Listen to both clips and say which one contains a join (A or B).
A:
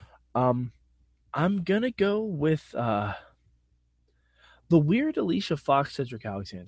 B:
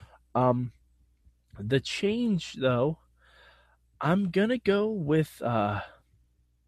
A